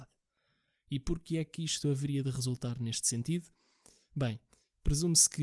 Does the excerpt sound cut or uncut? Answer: uncut